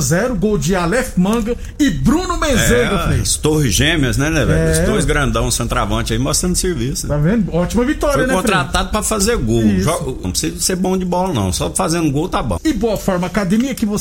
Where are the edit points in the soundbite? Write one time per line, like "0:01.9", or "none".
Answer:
0:10.2
0:12.6